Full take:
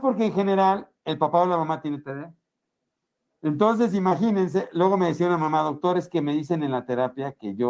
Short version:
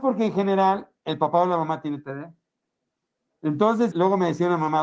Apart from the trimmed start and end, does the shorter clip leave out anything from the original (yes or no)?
yes